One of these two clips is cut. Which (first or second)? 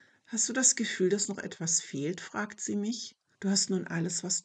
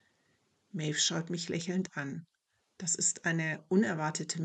first